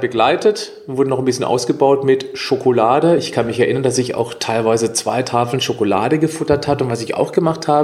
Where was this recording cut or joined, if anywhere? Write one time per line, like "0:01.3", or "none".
none